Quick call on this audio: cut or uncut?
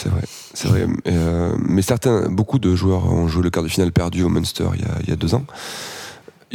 uncut